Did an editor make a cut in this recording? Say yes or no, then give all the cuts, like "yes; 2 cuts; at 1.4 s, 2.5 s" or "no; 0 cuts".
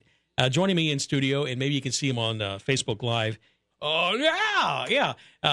yes; 1 cut; at 3.7 s